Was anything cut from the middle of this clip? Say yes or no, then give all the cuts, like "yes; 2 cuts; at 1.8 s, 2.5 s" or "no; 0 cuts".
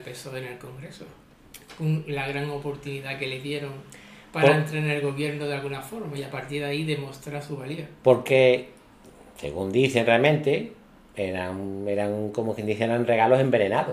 no; 0 cuts